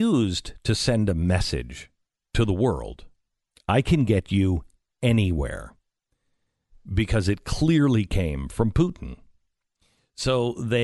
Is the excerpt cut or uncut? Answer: uncut